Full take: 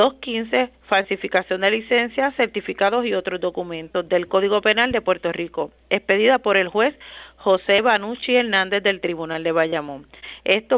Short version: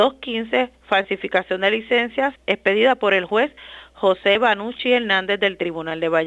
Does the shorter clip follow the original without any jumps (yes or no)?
no